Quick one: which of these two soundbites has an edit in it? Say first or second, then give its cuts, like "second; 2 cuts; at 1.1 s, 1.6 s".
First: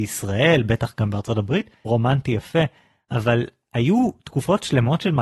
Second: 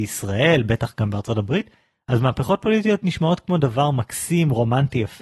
first; 1 cut; at 1.9 s